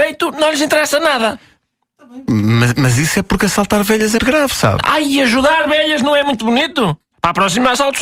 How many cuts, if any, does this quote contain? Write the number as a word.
two